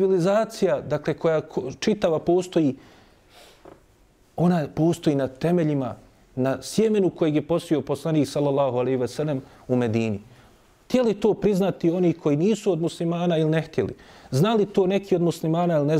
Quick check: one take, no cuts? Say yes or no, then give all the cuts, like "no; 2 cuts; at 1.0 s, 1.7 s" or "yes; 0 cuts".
yes; 0 cuts